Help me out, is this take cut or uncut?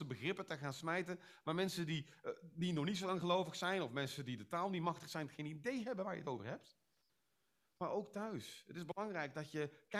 uncut